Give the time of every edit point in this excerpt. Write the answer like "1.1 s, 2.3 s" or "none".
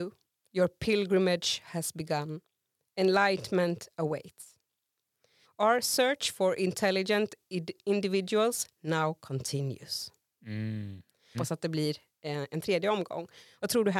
5.4 s, 11.3 s